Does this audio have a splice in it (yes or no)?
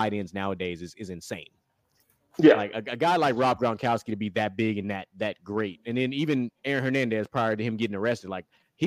no